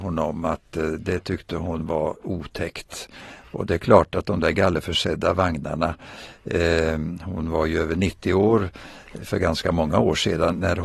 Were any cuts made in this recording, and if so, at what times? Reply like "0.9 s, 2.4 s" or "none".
none